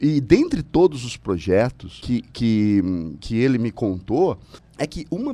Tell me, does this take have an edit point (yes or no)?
no